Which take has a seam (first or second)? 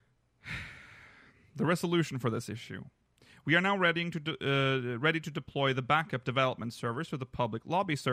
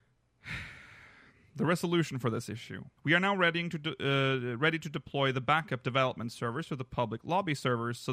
second